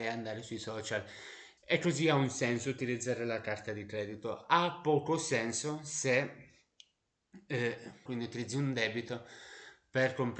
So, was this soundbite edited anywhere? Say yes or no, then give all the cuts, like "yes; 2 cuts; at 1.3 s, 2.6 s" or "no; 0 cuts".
yes; 2 cuts; at 1.6 s, 8.1 s